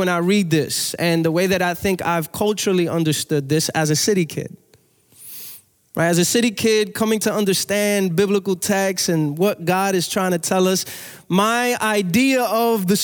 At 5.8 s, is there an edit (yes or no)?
no